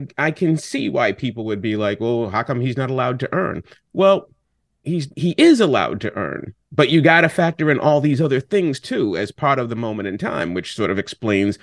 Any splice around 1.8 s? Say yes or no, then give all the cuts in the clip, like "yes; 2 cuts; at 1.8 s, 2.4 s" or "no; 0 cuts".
no; 2 cuts; at 5.1 s, 6.6 s